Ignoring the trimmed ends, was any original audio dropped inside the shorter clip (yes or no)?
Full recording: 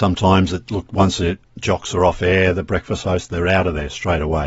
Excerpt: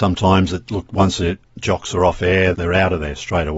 yes